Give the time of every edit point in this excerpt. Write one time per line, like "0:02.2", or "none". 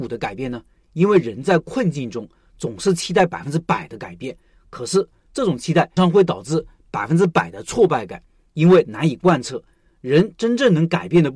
0:06.0

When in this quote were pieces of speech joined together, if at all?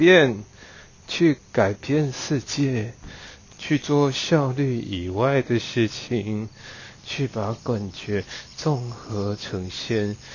0:03.5
0:07.0

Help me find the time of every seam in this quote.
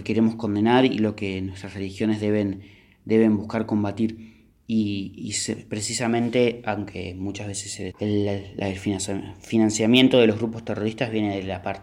0:07.9

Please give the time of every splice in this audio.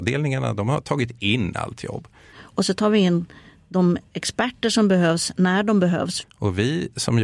0:02.3
0:06.2

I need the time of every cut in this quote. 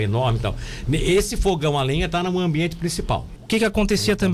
0:03.4

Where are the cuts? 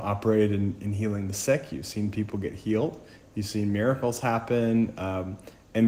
none

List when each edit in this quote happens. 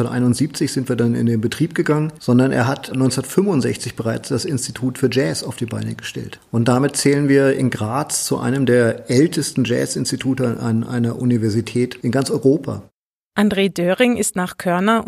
none

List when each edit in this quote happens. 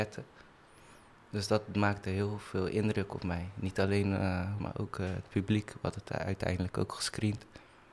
0:04.6

